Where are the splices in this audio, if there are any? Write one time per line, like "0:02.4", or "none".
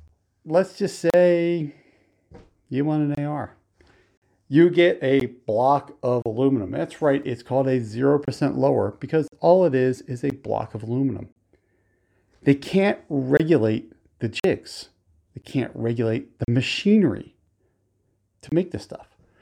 none

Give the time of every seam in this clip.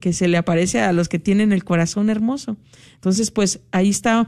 none

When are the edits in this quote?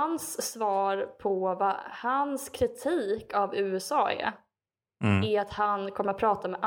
none

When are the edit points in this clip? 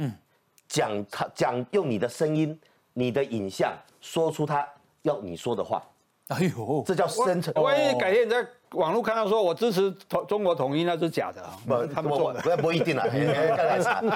0:07.6

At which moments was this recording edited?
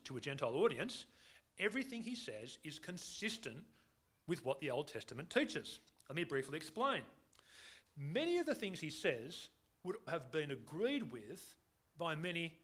0:07.8
0:10.1

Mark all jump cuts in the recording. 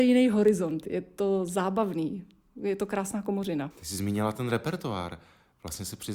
0:03.7

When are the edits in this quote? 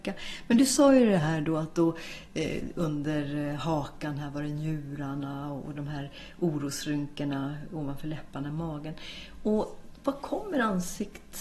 none

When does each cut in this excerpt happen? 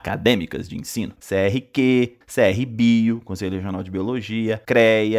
0:01.2
0:02.2

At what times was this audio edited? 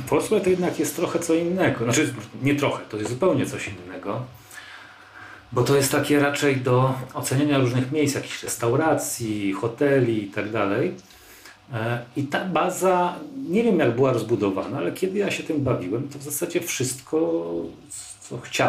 none

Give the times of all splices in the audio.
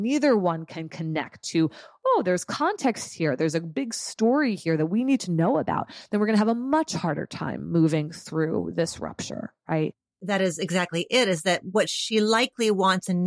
none

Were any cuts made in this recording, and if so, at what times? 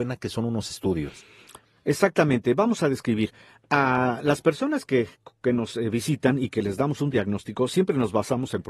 none

